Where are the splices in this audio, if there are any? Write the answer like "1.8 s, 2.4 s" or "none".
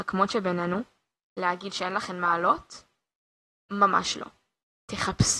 none